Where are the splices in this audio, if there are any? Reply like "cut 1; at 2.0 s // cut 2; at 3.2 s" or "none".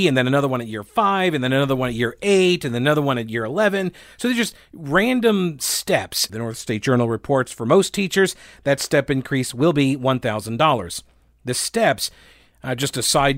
cut 1; at 6.3 s